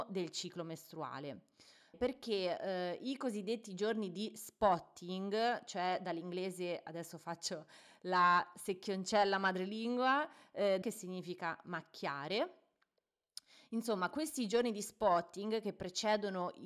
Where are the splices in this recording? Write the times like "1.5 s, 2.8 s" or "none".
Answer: 1.9 s, 10.8 s